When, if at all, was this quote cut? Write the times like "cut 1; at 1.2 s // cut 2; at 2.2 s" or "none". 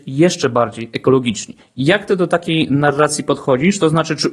cut 1; at 1.6 s